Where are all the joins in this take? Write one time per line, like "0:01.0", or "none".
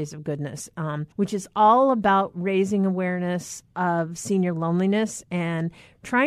0:01.1